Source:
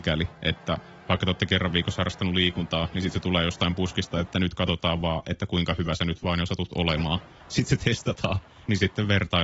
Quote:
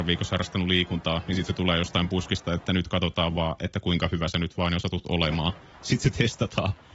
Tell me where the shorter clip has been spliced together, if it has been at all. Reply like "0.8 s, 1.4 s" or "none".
none